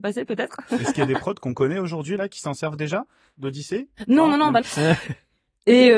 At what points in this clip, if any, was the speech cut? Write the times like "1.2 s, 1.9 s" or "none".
4.6 s